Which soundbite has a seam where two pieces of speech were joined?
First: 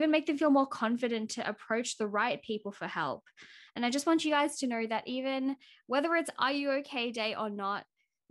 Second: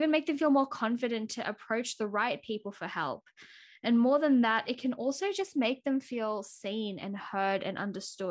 first; 1 cut; at 3.7 s

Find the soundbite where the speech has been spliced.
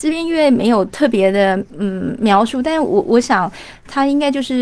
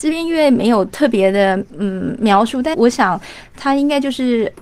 second; 1 cut; at 2.7 s

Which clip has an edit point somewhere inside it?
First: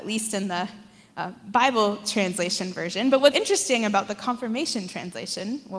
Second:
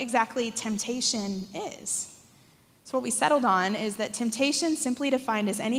first; 1 cut; at 3.3 s

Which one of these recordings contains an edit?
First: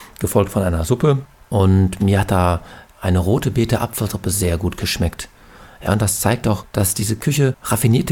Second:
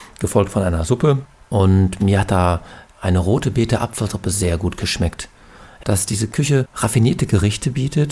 second; 1 cut; at 5.8 s

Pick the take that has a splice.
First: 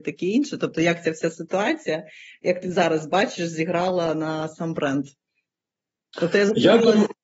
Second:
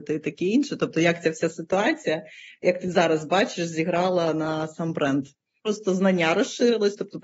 second; 1 cut; at 5.6 s

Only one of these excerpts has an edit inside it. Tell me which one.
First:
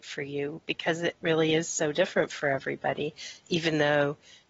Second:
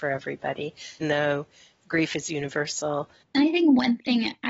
second; 2 cuts; at 1.0 s, 3.2 s

